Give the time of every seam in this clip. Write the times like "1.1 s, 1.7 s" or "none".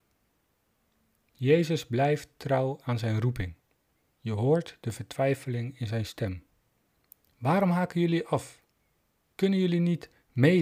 4.1 s